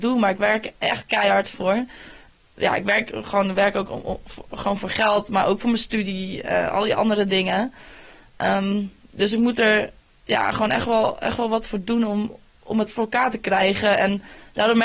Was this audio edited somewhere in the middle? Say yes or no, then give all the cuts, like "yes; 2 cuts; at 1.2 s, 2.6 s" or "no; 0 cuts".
no; 0 cuts